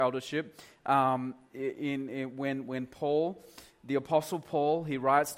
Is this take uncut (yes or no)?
yes